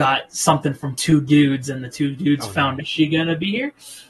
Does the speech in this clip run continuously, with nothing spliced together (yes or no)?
no